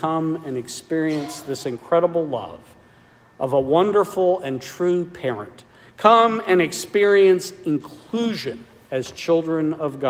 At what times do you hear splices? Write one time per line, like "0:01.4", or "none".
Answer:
none